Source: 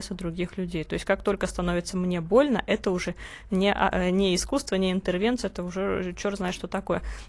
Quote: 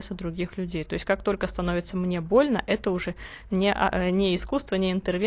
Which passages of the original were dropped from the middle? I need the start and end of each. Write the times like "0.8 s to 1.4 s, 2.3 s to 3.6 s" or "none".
none